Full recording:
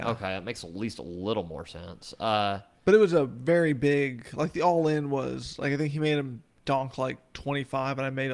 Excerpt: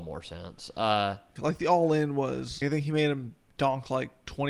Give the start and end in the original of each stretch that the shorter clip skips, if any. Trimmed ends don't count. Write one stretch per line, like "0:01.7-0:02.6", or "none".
0:02.8-0:04.3
0:05.6-0:05.7